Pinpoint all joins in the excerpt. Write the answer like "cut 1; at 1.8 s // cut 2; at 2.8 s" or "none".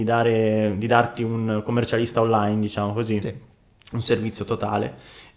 none